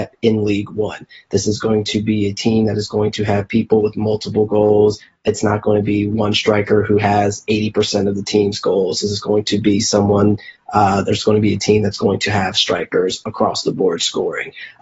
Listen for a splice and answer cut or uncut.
uncut